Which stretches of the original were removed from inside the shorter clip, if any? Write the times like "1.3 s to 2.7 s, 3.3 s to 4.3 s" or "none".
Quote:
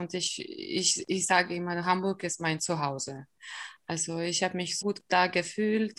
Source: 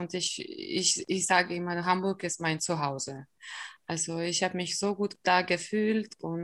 4.8 s to 5.0 s